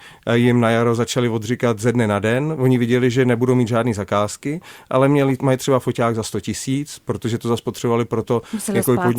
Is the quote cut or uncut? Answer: uncut